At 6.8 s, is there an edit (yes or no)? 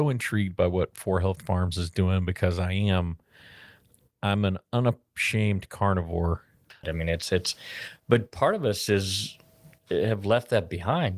yes